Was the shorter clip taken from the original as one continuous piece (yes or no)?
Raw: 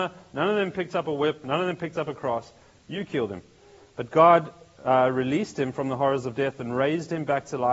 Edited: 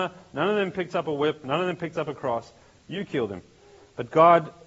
yes